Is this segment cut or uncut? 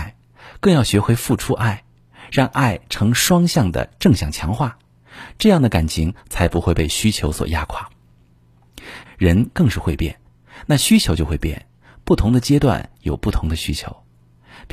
cut